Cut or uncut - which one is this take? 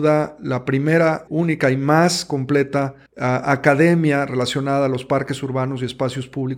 cut